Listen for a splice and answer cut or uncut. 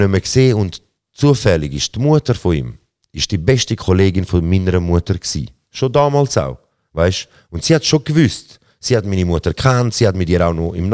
uncut